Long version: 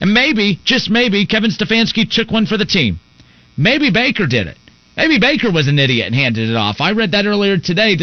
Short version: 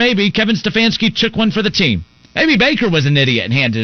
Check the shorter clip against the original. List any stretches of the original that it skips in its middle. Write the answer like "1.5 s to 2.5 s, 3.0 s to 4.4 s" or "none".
3.2 s to 4.9 s